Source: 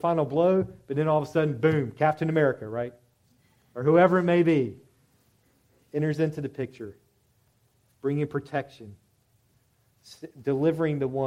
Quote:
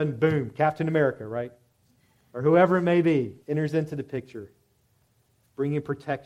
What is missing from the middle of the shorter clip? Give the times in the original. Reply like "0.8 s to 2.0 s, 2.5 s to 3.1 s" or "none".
4.8 s to 5.9 s